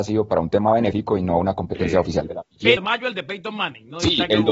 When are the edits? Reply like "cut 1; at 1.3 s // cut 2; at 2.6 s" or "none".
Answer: cut 1; at 2.8 s